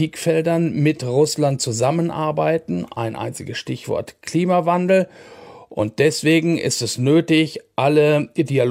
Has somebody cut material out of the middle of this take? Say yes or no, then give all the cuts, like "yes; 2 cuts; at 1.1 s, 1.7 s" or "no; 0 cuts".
no; 0 cuts